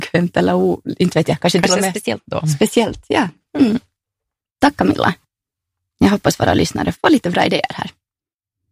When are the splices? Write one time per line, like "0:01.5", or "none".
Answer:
0:06.9